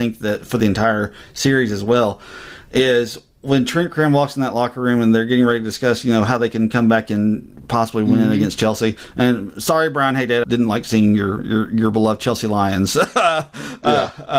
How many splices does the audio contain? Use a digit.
1